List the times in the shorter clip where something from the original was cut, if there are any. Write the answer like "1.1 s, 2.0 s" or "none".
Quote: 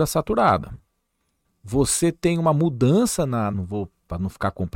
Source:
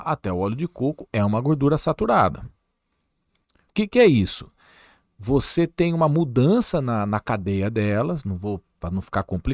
1.4 s, 3.5 s

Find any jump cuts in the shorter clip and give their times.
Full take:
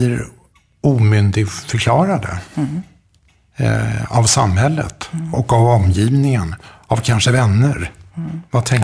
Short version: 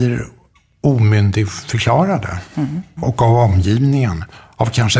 3.0 s

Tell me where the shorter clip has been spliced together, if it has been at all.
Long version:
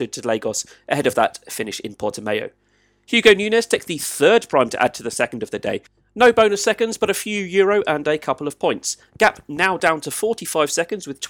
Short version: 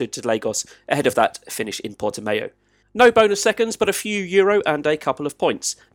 2.8 s

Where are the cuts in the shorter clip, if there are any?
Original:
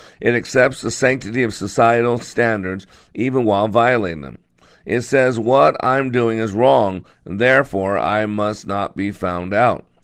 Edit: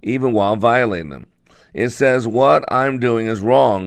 none

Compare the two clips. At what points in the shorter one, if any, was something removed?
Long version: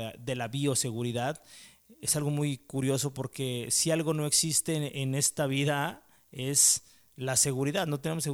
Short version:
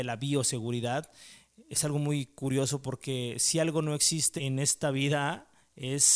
4.4 s

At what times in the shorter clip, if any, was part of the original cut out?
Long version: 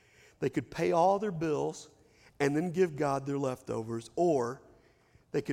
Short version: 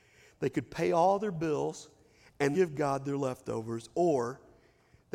2.5 s

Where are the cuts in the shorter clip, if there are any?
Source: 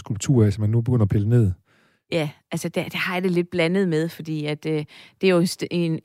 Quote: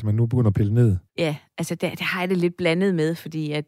1.1 s

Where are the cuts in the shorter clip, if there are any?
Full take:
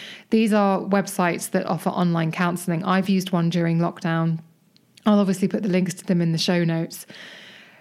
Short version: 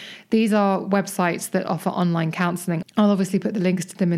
2.8 s

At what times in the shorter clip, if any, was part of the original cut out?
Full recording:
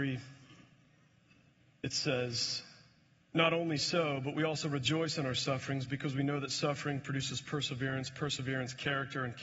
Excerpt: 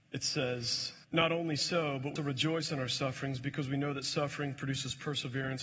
1.0 s, 2.2 s

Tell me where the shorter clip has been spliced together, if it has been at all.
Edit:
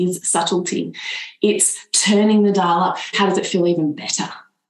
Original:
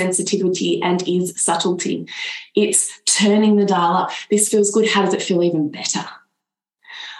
3.1 s

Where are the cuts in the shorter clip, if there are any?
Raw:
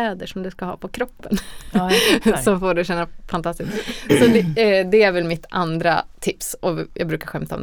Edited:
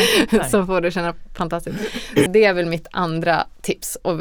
2.3 s

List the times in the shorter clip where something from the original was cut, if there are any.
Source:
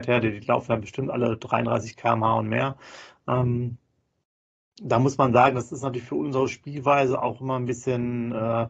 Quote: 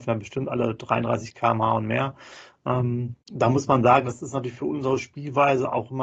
3.2 s

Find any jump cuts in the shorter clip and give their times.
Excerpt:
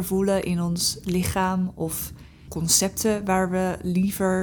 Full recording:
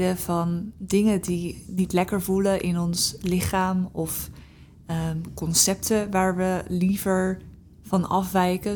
2.5 s

